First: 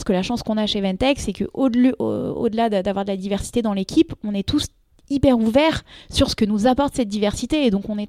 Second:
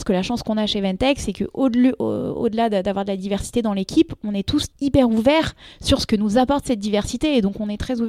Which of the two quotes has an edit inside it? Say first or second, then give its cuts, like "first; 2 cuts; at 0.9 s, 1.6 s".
second; 1 cut; at 4.7 s